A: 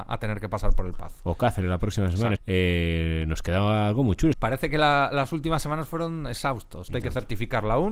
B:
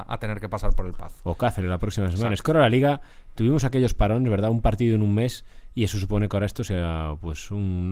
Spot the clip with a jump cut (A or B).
A